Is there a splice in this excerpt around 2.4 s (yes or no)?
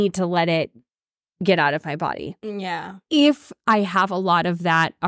no